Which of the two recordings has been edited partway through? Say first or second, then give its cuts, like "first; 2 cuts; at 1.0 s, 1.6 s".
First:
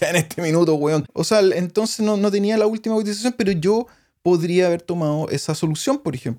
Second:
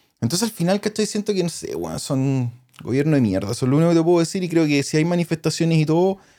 first; 1 cut; at 1.0 s